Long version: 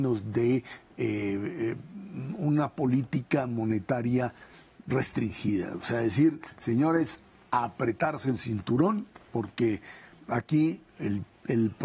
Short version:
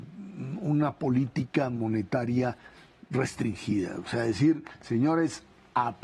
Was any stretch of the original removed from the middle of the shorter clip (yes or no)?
no